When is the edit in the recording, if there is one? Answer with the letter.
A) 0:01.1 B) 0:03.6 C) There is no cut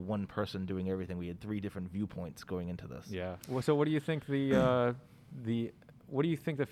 C